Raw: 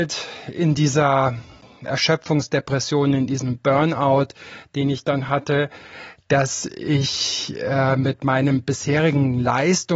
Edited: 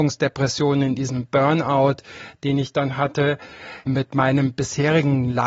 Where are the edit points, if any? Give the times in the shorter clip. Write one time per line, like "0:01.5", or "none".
0:03.9

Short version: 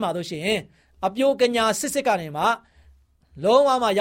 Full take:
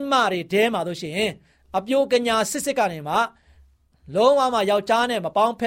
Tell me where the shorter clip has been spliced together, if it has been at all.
none

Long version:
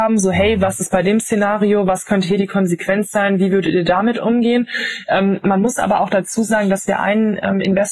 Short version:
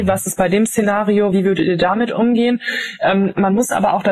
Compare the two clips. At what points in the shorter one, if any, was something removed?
0:01.3

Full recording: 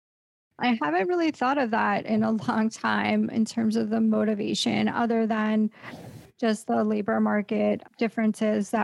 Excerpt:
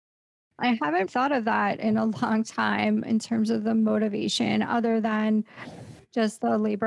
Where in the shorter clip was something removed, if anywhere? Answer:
0:01.1

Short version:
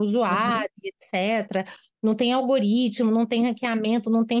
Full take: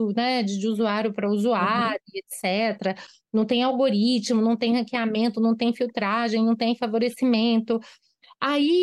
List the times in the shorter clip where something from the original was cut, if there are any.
none

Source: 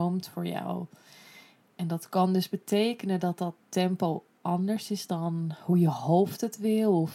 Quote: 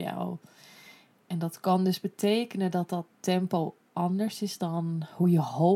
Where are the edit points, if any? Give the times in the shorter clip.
none

